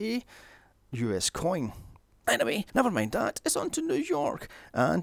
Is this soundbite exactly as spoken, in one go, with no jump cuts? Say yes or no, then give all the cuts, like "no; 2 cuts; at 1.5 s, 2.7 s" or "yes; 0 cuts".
no; 1 cut; at 2.2 s